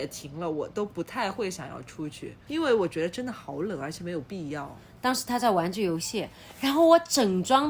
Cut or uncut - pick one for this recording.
cut